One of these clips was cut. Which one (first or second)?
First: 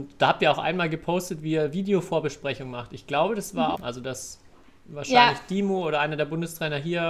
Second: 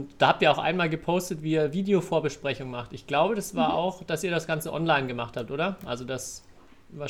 first